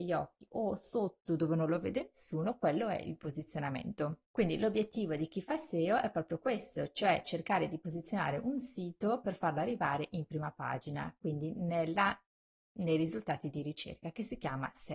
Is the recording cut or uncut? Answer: cut